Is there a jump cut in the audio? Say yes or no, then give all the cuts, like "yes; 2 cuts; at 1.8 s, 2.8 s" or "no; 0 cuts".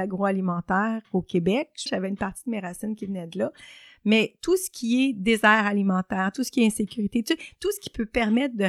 yes; 1 cut; at 1.9 s